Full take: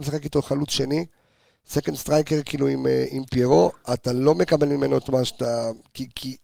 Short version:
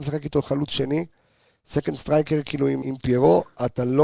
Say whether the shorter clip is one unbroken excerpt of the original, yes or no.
no